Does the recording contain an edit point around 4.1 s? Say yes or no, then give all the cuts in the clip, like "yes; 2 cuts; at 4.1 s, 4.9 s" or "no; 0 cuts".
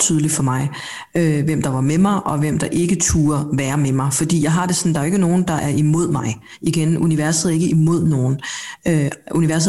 no; 0 cuts